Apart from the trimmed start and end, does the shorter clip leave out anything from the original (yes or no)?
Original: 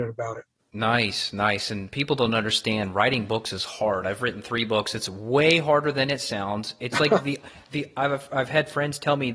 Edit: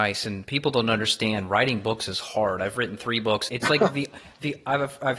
yes